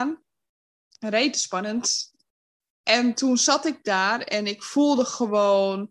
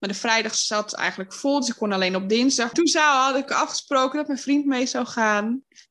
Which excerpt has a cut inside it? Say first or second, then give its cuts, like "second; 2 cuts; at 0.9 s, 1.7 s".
second; 1 cut; at 2.7 s